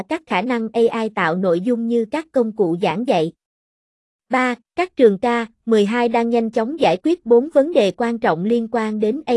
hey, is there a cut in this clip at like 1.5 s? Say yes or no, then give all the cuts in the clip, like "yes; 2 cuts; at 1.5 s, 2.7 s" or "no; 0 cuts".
no; 1 cut; at 4.6 s